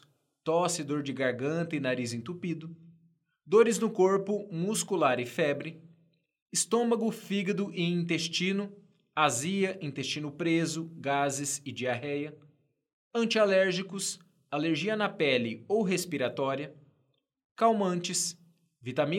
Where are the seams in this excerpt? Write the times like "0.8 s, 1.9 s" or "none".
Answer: none